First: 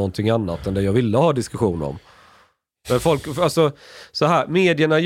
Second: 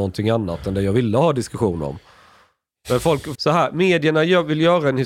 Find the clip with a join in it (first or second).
second